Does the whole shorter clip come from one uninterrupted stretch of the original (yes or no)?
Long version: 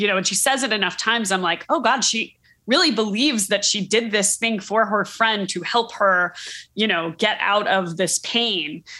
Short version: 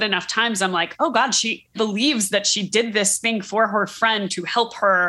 no